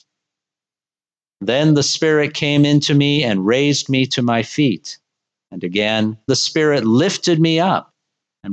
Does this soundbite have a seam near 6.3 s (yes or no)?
yes